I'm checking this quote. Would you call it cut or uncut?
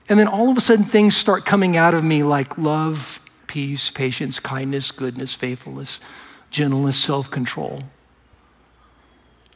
cut